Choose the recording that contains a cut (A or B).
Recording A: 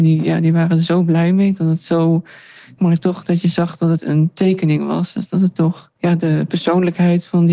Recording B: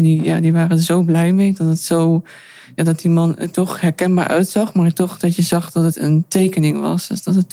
A